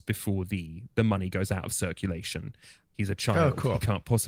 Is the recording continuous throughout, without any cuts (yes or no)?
no